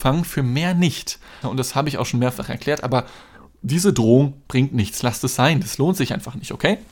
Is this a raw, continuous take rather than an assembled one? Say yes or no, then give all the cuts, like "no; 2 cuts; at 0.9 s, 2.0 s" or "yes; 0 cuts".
no; 1 cut; at 1.4 s